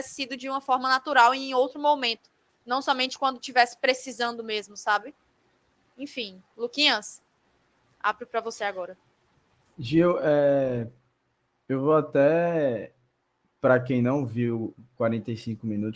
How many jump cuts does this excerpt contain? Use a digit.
0